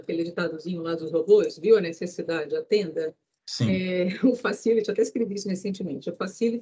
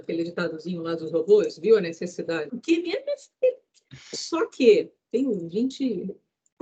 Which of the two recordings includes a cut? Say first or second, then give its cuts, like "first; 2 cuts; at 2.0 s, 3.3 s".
second; 1 cut; at 2.5 s